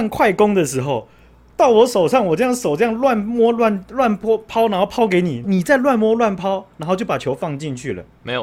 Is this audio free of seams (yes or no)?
no